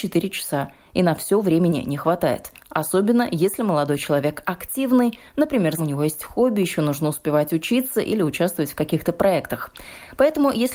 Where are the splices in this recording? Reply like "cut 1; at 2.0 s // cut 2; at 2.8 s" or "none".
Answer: cut 1; at 5.8 s